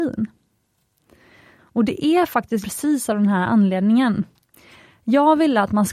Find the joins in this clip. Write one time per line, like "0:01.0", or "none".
0:01.6
0:02.6